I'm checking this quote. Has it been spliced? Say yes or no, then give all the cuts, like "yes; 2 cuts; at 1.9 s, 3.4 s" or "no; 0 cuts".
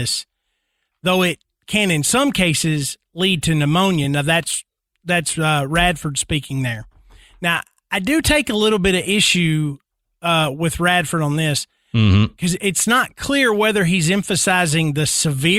no; 0 cuts